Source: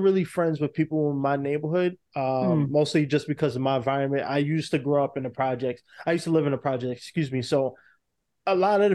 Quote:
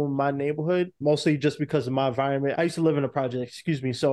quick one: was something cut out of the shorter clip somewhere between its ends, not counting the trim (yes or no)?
yes